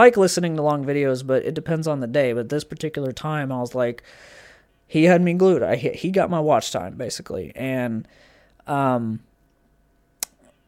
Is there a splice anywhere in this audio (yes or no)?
no